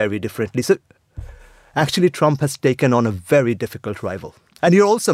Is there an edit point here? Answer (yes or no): no